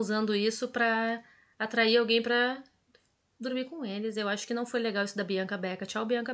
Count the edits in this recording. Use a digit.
0